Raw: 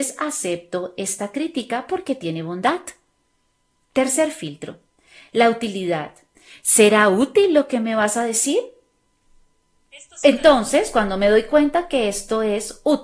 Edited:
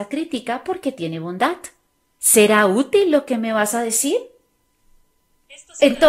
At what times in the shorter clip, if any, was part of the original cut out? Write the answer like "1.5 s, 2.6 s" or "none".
2.2 s